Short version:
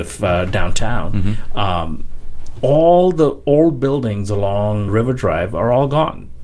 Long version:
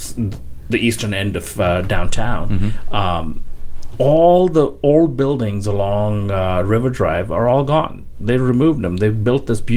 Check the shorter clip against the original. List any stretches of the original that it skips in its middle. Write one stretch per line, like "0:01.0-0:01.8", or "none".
0:06.2-0:06.6